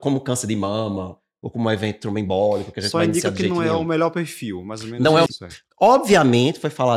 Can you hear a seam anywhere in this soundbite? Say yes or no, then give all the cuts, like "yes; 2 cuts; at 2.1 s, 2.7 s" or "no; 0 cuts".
yes; 1 cut; at 5.3 s